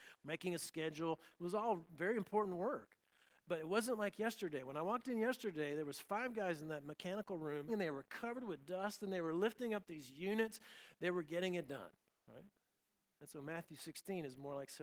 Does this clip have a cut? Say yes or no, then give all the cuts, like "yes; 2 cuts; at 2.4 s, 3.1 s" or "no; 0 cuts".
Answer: yes; 1 cut; at 7.7 s